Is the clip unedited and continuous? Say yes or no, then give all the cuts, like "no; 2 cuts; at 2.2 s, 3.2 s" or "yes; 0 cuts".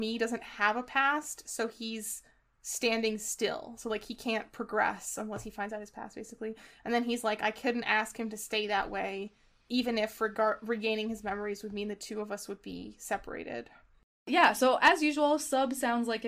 yes; 0 cuts